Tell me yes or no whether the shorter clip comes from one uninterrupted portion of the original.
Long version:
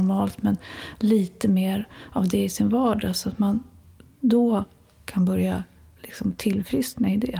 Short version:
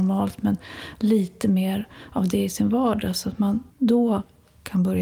no